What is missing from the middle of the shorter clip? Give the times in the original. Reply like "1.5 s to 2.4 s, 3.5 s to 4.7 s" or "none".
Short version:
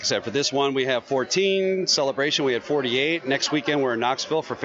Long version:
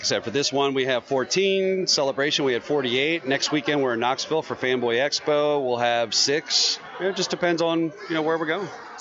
none